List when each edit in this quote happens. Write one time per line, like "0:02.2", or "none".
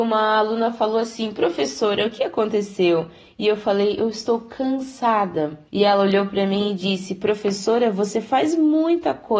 0:05.7